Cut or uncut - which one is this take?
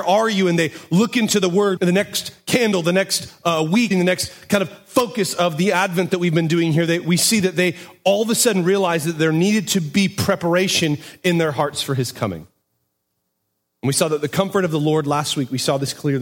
cut